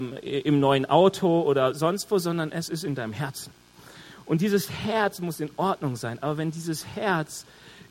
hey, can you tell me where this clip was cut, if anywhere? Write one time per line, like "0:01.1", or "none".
none